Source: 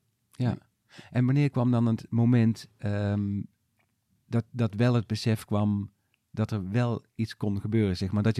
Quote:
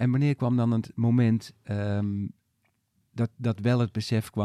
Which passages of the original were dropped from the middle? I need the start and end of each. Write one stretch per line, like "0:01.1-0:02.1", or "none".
none